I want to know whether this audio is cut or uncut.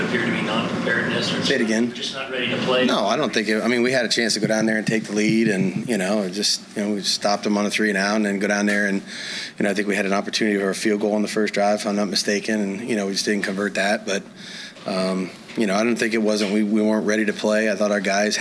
uncut